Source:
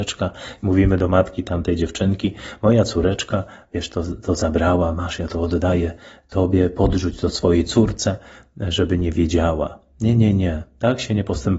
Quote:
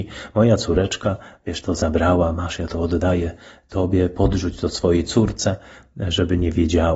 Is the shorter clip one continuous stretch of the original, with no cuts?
no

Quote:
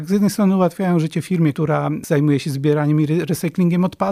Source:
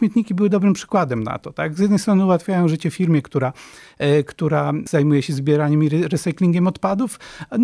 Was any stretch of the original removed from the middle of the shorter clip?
yes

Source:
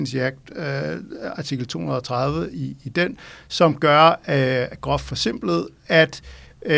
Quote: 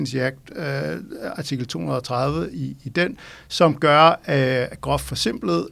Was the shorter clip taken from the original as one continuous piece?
yes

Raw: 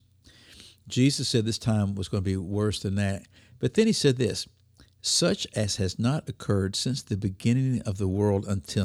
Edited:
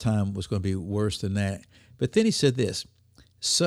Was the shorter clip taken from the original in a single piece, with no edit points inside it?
yes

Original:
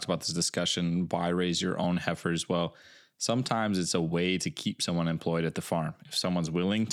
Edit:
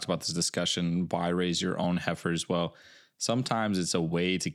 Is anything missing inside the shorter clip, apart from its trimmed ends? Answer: no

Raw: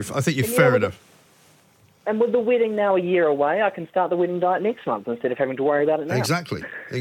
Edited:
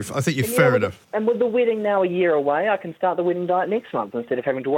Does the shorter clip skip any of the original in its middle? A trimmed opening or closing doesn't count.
yes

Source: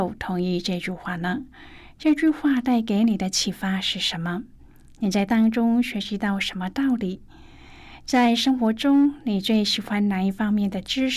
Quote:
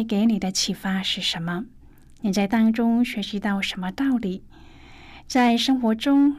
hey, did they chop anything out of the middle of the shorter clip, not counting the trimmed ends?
no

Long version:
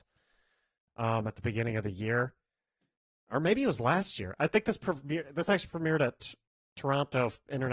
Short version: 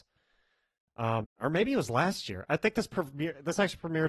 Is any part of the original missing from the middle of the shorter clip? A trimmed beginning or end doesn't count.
yes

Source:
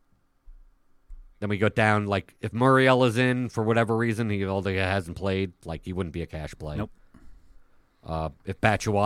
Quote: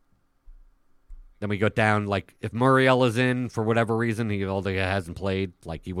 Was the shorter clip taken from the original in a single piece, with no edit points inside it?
yes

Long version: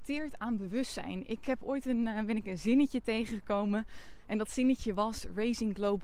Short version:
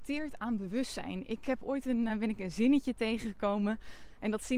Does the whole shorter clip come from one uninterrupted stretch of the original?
no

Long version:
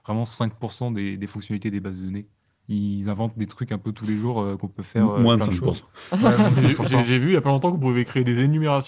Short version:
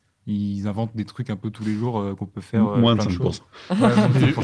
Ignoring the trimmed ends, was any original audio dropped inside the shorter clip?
no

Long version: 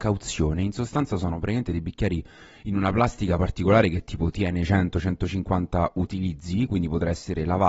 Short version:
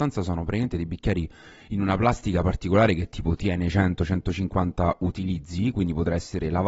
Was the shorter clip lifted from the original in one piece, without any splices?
yes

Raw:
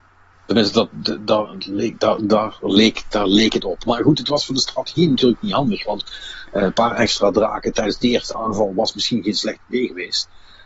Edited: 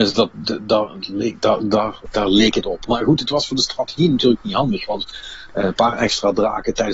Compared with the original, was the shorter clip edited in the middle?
yes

